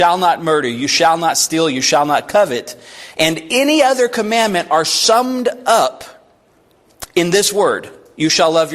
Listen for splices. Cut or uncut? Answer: uncut